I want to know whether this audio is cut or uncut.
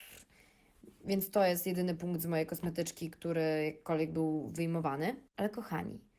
cut